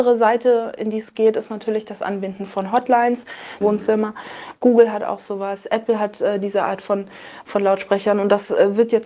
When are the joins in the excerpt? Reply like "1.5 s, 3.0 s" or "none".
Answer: 3.6 s